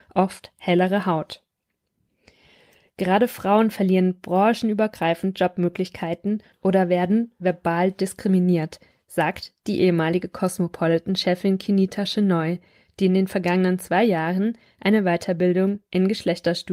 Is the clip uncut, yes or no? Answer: yes